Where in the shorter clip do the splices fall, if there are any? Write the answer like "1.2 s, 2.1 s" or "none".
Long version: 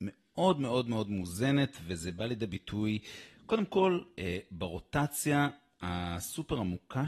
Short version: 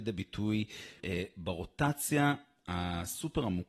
1.0 s